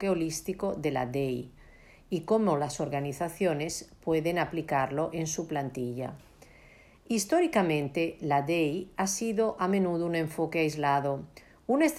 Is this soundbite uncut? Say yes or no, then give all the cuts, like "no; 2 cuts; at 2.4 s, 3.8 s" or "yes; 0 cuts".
yes; 0 cuts